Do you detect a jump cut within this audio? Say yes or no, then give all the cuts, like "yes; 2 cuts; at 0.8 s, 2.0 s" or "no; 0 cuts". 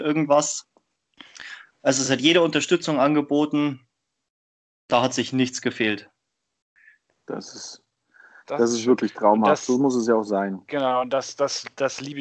no; 0 cuts